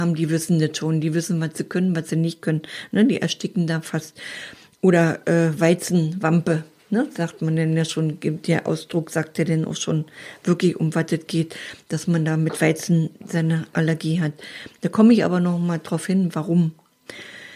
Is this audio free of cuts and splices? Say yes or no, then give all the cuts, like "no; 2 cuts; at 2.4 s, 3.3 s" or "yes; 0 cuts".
yes; 0 cuts